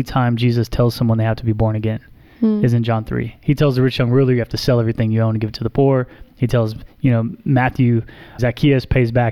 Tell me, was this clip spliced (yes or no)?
yes